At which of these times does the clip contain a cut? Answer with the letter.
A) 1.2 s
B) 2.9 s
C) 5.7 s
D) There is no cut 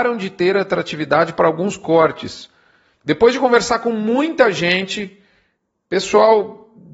B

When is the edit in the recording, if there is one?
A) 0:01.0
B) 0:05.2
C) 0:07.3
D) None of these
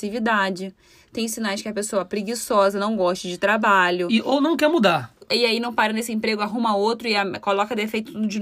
B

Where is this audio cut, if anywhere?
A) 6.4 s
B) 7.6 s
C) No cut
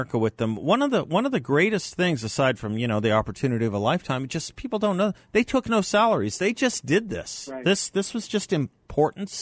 C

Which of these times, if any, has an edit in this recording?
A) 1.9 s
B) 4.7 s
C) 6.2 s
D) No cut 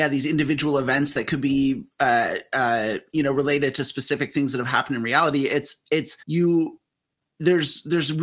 C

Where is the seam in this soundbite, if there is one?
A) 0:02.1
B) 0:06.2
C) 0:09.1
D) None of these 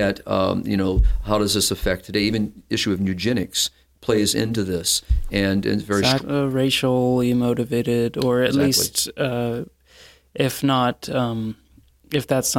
B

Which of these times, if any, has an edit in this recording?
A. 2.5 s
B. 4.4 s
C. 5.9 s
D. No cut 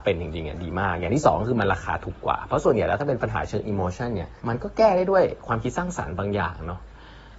B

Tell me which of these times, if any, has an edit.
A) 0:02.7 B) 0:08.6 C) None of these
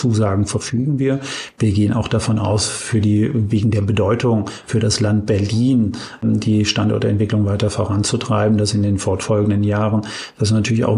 C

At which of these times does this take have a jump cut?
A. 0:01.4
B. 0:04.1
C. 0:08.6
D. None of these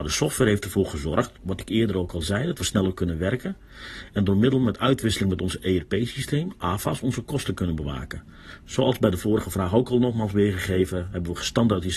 A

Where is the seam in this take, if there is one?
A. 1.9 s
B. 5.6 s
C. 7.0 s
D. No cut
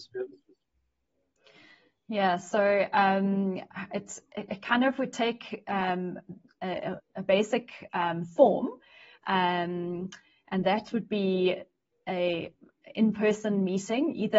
C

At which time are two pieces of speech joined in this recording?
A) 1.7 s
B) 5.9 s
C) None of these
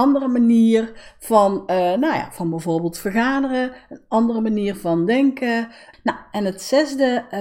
B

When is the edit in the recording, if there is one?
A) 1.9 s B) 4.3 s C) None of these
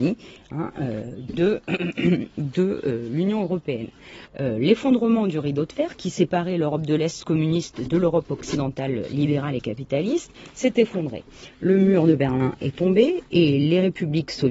B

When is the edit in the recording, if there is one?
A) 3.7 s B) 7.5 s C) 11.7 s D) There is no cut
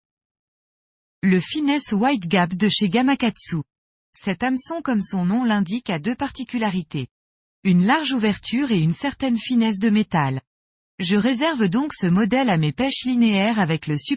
D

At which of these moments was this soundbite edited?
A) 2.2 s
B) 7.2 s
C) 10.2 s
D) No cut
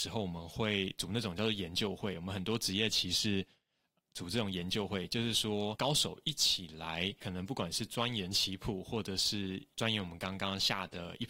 D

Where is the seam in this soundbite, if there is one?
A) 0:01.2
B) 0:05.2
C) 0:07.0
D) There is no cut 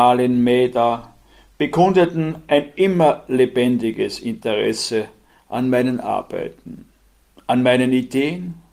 D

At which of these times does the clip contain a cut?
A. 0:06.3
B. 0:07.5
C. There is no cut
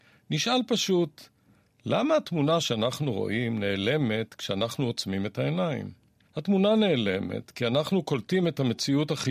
A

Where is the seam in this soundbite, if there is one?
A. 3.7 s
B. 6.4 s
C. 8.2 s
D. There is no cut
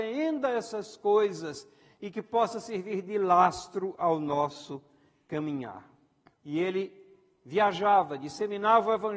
B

